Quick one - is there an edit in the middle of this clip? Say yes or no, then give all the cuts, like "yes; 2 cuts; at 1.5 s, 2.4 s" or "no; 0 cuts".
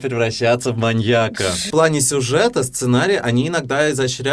yes; 1 cut; at 1.7 s